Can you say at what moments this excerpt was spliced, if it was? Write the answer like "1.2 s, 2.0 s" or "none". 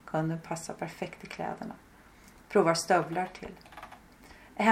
none